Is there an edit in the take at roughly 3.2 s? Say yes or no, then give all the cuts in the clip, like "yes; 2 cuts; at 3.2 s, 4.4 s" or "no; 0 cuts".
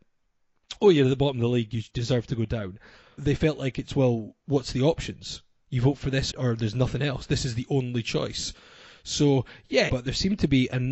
yes; 3 cuts; at 3.2 s, 6.3 s, 9.9 s